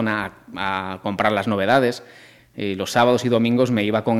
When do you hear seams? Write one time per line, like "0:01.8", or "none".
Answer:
0:02.4